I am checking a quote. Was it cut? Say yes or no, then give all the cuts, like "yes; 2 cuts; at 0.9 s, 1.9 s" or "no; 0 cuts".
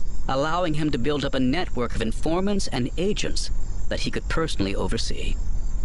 no; 0 cuts